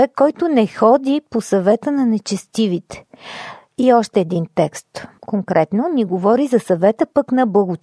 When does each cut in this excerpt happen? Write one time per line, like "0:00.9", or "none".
0:03.7
0:05.2